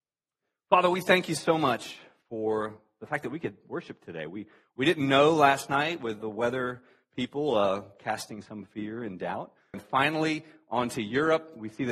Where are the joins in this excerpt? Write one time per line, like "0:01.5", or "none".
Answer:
0:06.2
0:09.7